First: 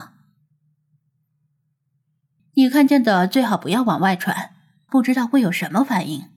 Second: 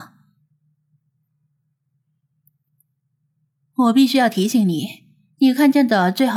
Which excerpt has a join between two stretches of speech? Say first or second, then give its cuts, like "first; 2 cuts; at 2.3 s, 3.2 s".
first; 2 cuts; at 2.4 s, 4.9 s